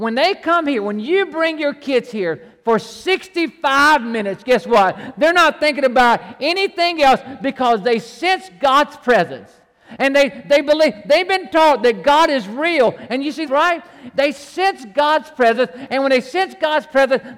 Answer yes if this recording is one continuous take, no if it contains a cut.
no